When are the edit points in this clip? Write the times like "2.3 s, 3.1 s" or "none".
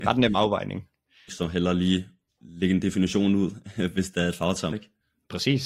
1.3 s, 4.7 s